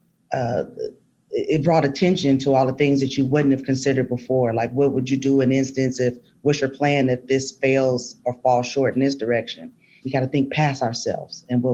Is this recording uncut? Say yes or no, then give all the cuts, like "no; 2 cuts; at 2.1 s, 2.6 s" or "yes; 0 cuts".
no; 1 cut; at 10.0 s